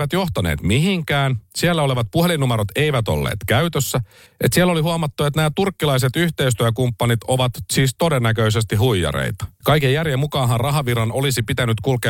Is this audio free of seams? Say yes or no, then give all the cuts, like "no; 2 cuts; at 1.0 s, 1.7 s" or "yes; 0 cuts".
no; 2 cuts; at 4.3 s, 9.6 s